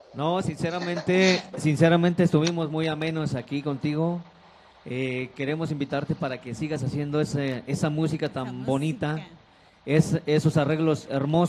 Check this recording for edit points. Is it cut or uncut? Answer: uncut